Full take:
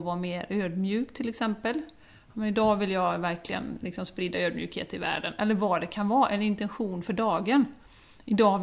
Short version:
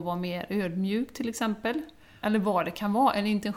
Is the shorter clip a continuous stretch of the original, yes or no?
no